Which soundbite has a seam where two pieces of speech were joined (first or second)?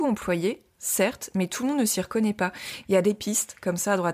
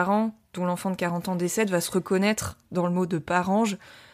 first